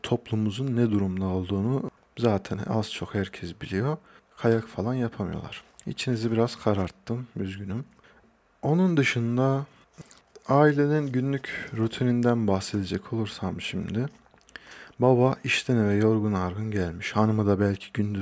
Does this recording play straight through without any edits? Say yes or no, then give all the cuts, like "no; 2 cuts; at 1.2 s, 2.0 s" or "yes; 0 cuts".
yes; 0 cuts